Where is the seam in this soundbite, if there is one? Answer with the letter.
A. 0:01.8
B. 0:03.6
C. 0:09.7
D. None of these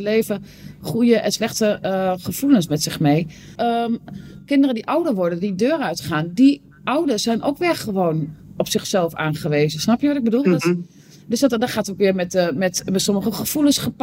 B